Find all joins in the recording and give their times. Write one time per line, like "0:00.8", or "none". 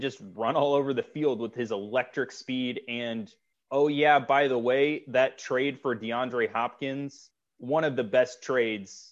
none

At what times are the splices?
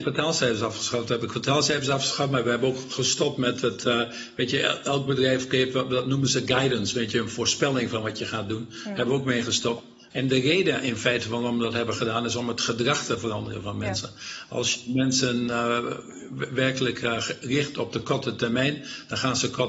0:10.1

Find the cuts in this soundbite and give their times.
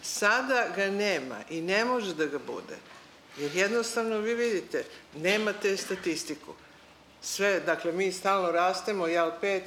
none

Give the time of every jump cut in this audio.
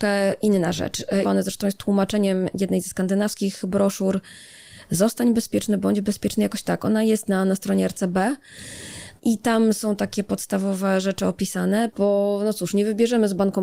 0:01.2
0:11.9

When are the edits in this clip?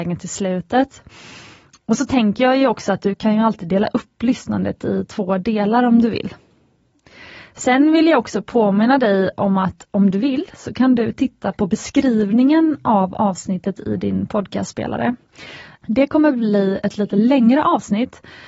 0:15.7

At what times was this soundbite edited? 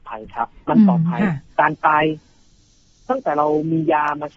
0:01.5

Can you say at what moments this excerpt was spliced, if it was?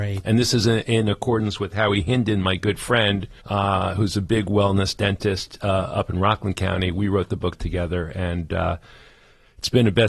0:03.4

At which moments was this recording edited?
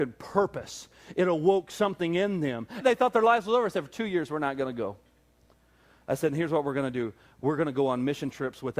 0:02.8

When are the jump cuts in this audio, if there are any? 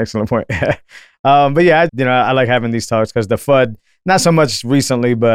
0:01.9

